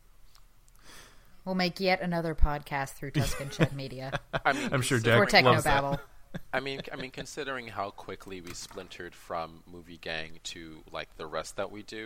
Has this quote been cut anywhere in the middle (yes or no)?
no